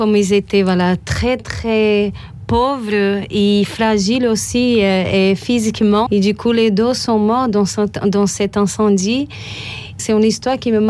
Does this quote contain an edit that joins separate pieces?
yes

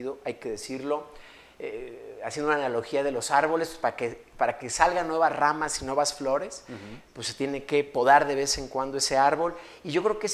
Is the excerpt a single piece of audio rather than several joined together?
yes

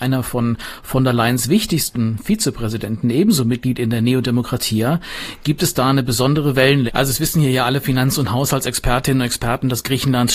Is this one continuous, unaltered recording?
no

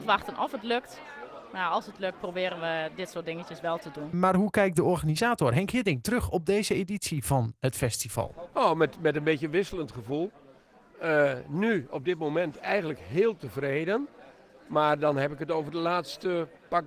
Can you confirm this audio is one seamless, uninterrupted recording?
no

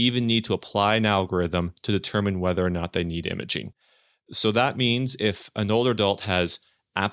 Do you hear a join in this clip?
no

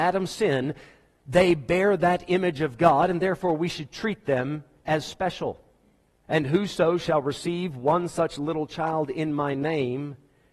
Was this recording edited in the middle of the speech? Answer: yes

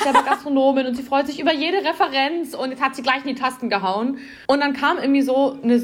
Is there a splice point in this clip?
yes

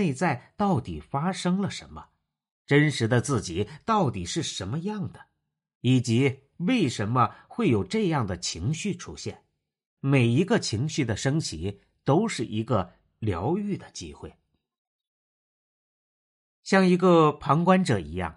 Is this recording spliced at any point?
yes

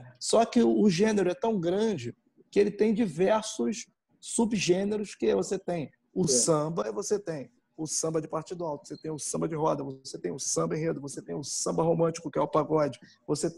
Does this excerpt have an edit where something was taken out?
no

